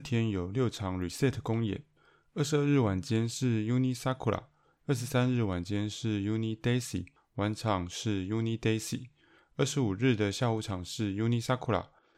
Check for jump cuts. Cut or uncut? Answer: cut